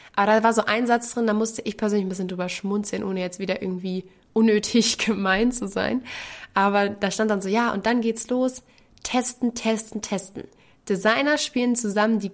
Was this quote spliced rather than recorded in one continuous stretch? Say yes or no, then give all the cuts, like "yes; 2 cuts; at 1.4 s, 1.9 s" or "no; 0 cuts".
no; 0 cuts